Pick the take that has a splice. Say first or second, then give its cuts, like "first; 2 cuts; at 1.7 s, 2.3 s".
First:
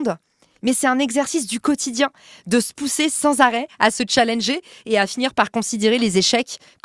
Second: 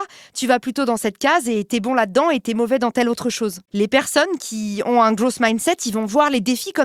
second; 1 cut; at 3.7 s